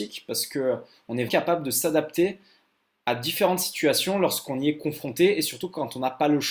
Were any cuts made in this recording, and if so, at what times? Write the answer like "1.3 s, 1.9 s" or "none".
1.3 s